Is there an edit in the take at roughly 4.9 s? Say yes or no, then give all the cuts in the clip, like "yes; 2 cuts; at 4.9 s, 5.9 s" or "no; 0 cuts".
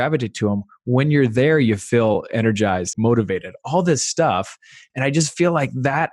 no; 1 cut; at 2.9 s